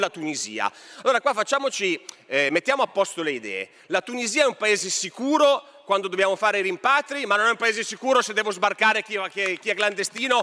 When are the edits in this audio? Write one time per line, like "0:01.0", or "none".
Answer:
none